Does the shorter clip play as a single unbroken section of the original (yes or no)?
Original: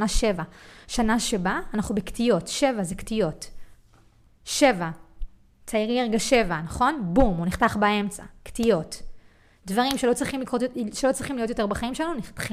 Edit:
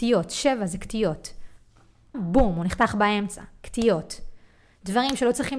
no